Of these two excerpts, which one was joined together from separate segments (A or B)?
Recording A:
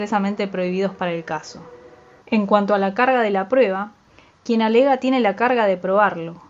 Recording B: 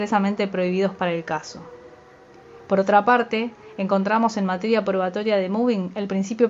A